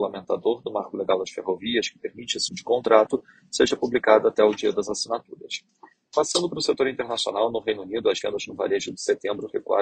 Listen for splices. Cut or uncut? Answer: cut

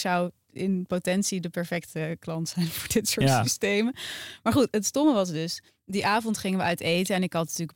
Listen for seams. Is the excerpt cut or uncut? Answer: cut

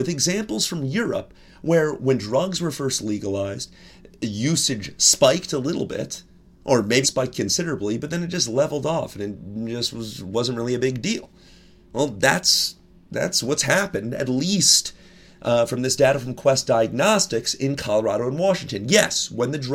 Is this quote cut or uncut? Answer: cut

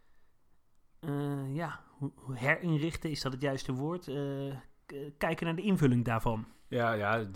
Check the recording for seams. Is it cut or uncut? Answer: uncut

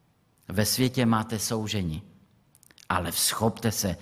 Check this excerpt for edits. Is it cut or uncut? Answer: uncut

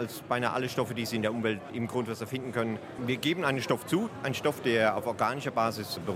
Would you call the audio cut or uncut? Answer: cut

